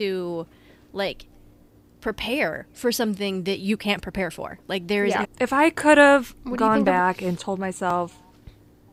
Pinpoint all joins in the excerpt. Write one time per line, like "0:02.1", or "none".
0:05.2
0:07.4